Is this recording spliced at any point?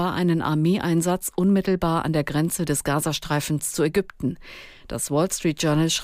no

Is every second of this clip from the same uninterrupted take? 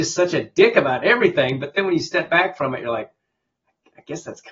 yes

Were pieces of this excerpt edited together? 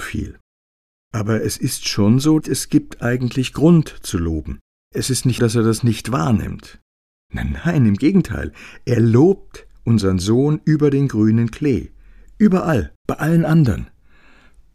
yes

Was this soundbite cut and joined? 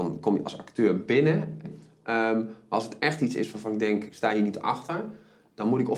yes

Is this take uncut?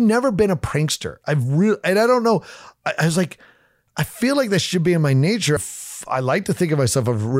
no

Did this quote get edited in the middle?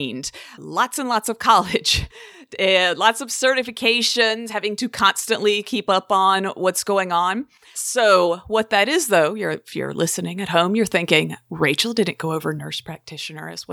yes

